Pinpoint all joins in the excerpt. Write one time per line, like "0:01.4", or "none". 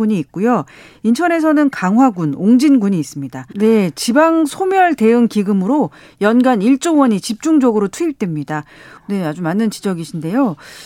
0:03.5
0:09.0